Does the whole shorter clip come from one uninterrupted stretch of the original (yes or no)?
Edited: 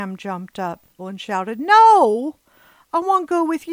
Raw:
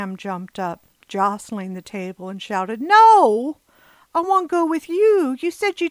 no